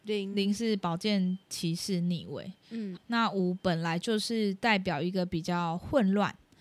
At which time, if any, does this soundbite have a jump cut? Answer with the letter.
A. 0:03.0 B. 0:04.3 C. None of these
A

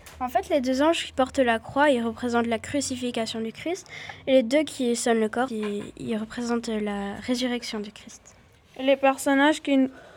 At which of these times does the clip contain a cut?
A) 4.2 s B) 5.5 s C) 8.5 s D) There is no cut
B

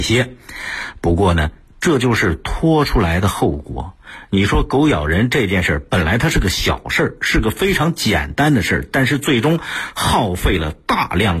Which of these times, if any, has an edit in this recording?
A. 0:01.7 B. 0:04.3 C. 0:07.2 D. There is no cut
A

